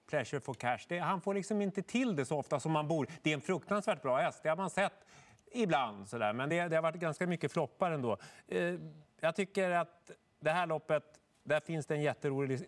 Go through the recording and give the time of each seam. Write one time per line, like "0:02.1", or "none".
none